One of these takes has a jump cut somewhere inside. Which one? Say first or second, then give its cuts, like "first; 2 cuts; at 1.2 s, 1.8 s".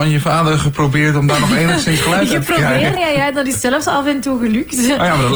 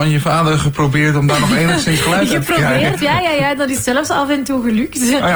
first; 1 cut; at 3.0 s